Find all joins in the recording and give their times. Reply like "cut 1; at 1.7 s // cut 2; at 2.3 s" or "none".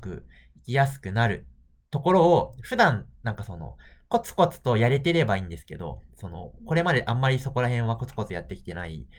none